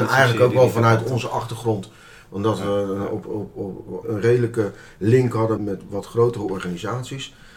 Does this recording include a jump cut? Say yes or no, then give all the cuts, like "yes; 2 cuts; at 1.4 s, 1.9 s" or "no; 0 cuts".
yes; 2 cuts; at 4.0 s, 5.6 s